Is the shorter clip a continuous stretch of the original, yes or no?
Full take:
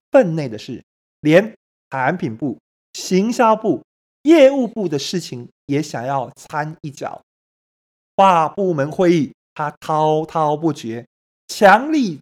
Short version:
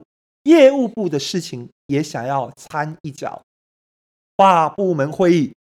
yes